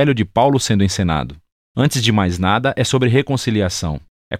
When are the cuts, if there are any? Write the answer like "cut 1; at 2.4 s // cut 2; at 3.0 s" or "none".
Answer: none